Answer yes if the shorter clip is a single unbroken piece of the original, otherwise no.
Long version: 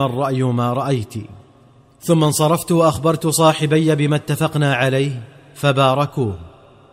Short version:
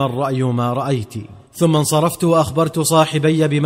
no